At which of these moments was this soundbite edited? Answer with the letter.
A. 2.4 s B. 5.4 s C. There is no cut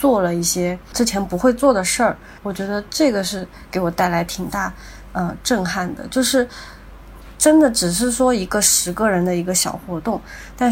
A